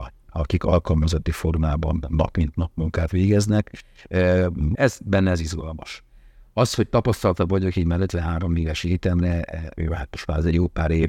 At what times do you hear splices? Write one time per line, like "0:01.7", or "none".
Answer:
0:04.8
0:09.8